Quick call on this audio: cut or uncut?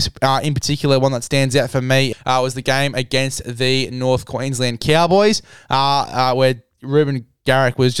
cut